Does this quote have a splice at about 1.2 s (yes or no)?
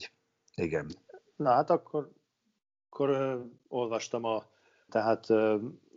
no